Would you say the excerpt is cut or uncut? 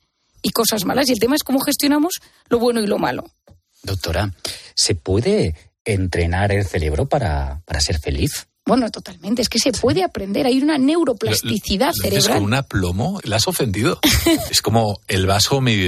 cut